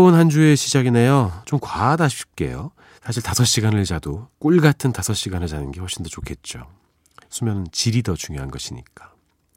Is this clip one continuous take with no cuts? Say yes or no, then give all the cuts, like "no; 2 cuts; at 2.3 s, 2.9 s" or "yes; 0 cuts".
no; 3 cuts; at 1.4 s, 3.0 s, 4.3 s